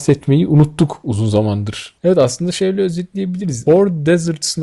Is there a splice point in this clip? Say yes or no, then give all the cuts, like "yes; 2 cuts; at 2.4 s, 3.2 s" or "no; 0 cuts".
yes; 1 cut; at 2.0 s